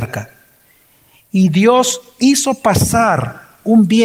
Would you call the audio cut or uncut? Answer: uncut